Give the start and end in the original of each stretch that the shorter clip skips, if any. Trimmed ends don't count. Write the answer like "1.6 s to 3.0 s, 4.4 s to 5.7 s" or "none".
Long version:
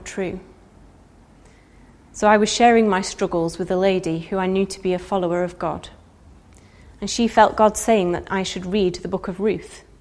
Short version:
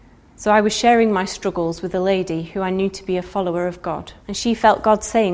6.0 s to 6.9 s